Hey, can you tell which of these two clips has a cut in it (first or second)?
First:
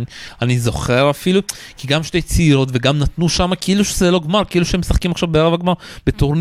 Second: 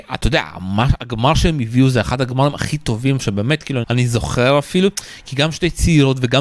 second